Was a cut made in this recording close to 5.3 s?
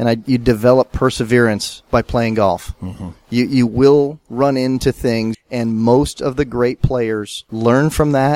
yes; 1 cut; at 5.3 s

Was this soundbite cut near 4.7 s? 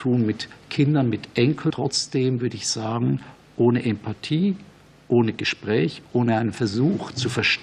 no; 1 cut; at 1.7 s

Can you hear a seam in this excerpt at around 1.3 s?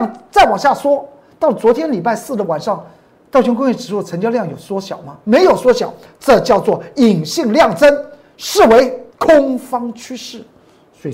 no; 1 cut; at 9.1 s

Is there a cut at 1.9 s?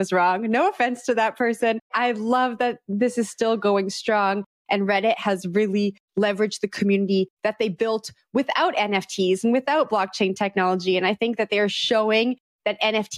yes; 1 cut; at 1.9 s

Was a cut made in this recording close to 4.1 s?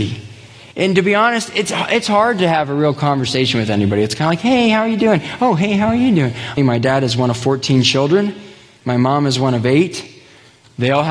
no; 1 cut; at 6.6 s

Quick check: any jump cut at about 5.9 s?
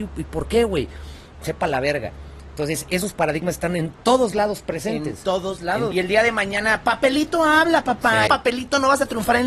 yes; 2 cuts; at 5.9 s, 8.3 s

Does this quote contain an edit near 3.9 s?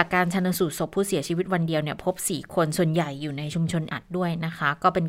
yes; 1 cut; at 3.9 s

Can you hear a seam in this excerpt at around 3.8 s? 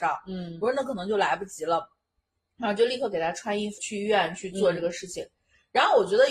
yes; 1 cut; at 3.8 s

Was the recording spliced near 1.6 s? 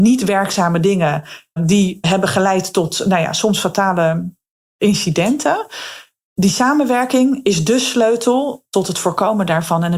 yes; 1 cut; at 1.6 s

